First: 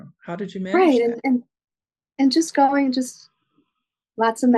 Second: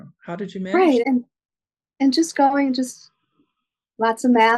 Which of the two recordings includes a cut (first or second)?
second